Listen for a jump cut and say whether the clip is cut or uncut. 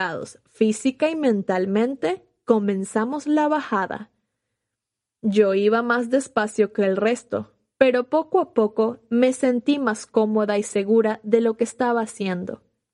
uncut